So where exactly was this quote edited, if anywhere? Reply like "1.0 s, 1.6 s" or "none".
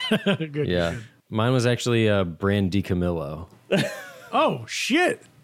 none